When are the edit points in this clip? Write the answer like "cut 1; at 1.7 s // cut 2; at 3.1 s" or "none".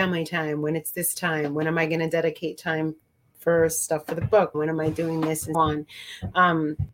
cut 1; at 4.5 s // cut 2; at 5.5 s